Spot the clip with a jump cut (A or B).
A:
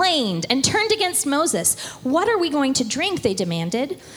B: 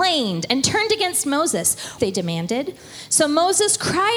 B